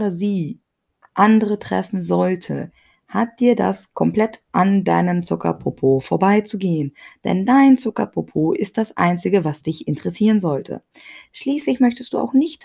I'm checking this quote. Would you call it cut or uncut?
uncut